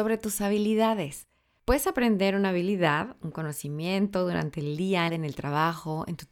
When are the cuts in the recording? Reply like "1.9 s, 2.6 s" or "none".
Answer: 5.1 s